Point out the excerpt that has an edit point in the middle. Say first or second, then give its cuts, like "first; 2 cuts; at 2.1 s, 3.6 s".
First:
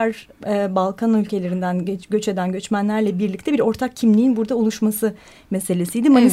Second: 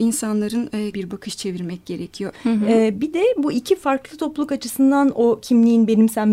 second; 2 cuts; at 0.9 s, 2.3 s